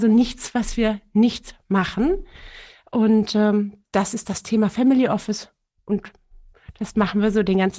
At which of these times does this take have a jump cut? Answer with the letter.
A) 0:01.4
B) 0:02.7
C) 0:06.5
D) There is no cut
D